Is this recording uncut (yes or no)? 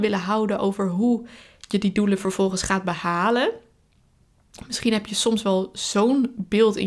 yes